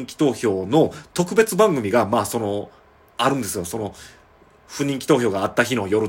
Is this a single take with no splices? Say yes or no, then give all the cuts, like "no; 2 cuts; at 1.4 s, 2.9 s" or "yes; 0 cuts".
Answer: yes; 0 cuts